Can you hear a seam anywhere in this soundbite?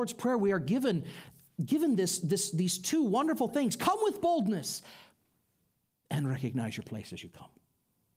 no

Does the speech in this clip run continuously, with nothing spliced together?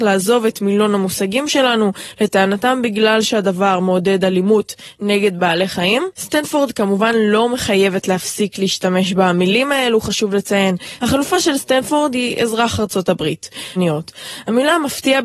no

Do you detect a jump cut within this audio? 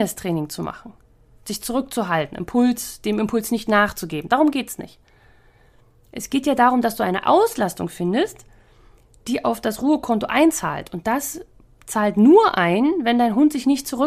no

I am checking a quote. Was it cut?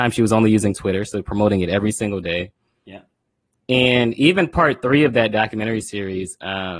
no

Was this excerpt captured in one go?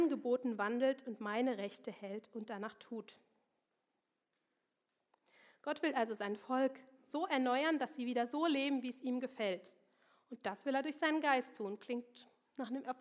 yes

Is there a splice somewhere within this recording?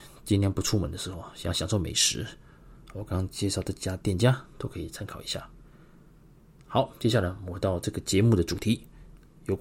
no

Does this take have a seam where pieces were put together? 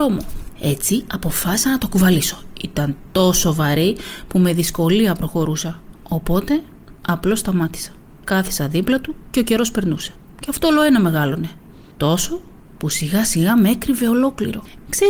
no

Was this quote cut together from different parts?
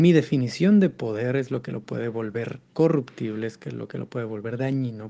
no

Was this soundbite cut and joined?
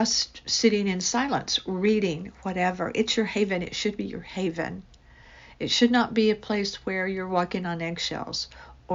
no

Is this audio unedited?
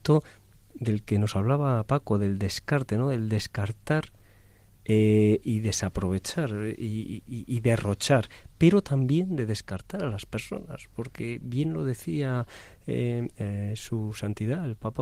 no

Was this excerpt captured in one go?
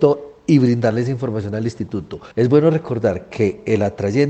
no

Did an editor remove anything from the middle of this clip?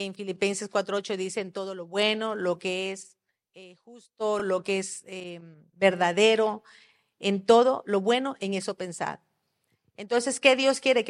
no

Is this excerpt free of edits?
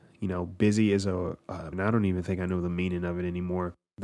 no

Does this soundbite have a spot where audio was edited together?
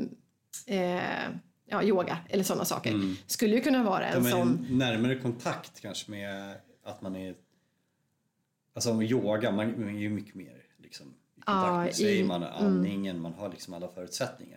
no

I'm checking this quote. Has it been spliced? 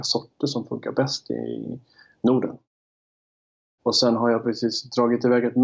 yes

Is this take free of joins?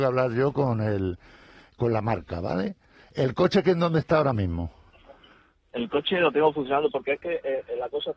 yes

